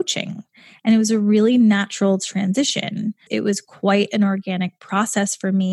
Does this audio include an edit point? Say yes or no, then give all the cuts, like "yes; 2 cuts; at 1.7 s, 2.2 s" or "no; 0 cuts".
yes; 1 cut; at 3.3 s